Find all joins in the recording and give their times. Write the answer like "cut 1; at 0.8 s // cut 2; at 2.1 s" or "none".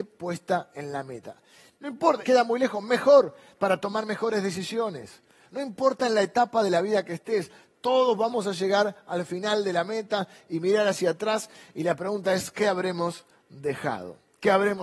cut 1; at 2.2 s // cut 2; at 3.6 s